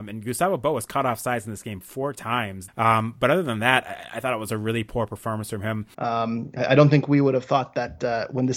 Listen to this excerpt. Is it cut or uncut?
cut